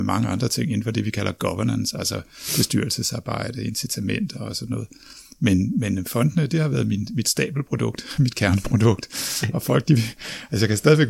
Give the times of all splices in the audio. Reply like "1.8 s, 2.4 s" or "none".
none